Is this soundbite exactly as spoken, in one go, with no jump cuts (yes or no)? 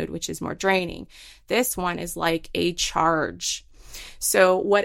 yes